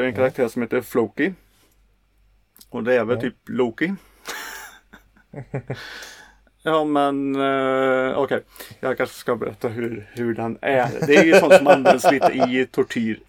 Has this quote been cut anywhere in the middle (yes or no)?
yes